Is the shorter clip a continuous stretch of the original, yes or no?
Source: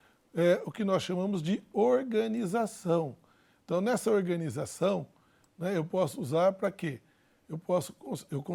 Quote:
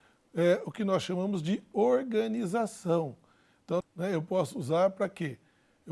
no